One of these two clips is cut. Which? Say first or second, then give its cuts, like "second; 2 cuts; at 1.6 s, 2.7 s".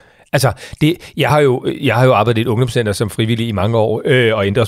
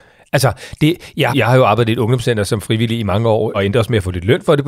second; 2 cuts; at 1.3 s, 3.5 s